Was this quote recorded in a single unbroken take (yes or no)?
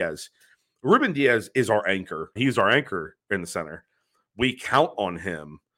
no